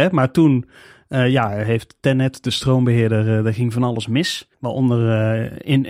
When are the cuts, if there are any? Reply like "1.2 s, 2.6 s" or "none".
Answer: 4.5 s